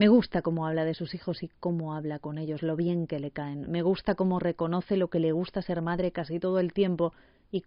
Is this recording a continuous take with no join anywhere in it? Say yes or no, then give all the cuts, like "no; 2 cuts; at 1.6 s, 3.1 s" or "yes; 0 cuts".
yes; 0 cuts